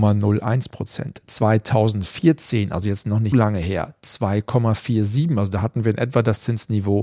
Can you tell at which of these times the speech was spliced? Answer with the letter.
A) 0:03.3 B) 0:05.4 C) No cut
A